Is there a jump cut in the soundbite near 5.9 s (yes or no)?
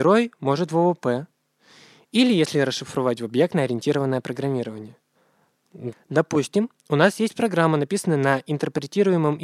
yes